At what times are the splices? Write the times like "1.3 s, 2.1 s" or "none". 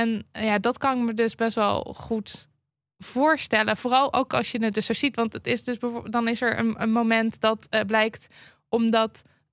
none